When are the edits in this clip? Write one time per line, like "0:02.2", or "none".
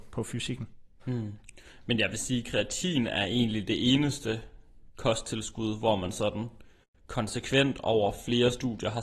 none